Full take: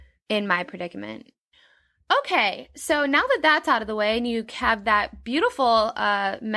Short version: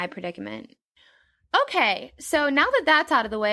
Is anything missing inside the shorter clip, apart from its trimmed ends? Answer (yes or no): no